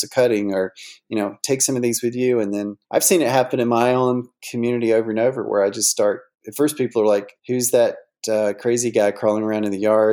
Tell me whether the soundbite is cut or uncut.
cut